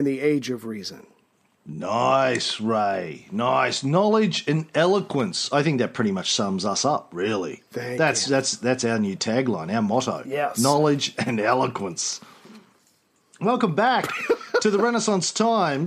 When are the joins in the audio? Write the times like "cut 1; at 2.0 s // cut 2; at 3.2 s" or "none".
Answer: none